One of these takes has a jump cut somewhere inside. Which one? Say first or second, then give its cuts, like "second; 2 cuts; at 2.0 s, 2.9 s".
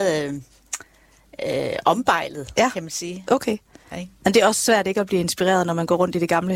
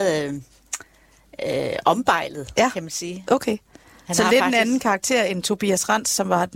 first; 1 cut; at 3.9 s